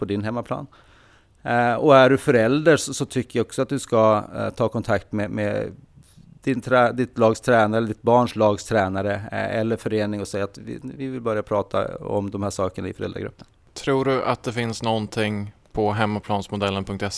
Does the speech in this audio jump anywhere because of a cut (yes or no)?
no